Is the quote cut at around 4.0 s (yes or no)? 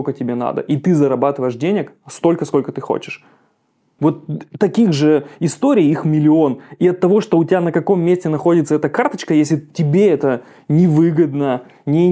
yes